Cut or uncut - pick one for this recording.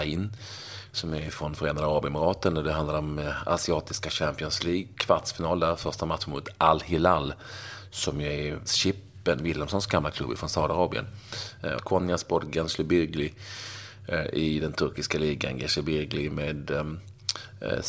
cut